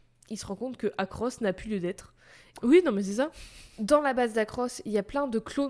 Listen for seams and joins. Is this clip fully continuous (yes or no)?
no